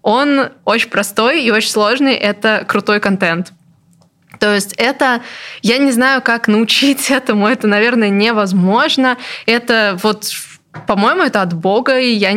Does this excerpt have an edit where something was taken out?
no; 0 cuts

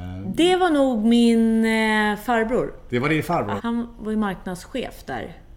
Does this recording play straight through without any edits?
no; 1 cut; at 3.6 s

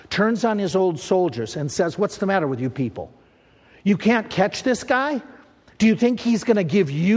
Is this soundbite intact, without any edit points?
yes; 0 cuts

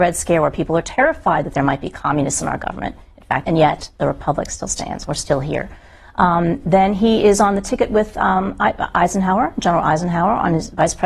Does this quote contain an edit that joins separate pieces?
yes; 1 cut; at 3.4 s

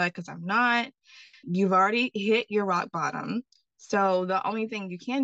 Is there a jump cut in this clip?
yes; 1 cut; at 1.4 s

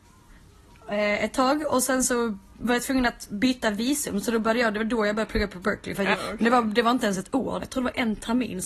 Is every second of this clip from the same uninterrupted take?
no; 2 cuts; at 6.1 s, 7.6 s

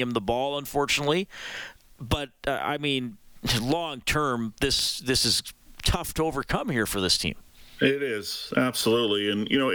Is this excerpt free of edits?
yes; 0 cuts

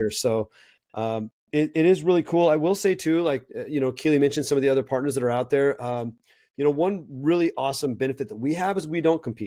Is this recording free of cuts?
yes; 0 cuts

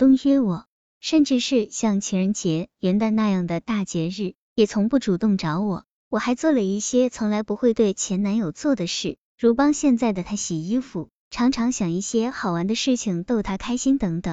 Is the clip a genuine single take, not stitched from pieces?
no; 1 cut; at 2.7 s

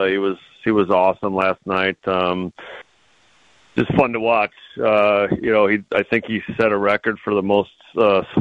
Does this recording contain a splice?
no; 0 cuts

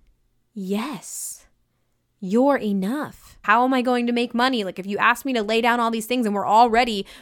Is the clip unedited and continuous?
no; 1 cut; at 3.4 s

